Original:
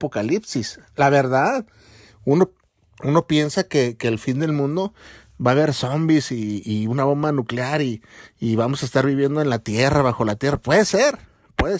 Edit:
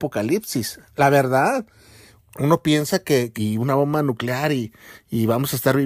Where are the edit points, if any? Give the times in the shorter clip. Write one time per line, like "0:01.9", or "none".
0:02.2
0:03.3